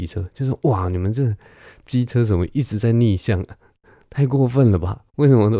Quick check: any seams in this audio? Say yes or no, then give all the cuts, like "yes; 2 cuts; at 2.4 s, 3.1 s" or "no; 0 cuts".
no; 0 cuts